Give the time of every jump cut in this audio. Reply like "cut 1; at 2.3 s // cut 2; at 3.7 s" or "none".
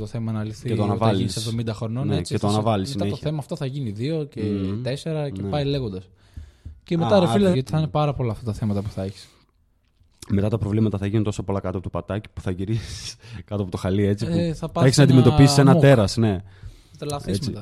cut 1; at 7.5 s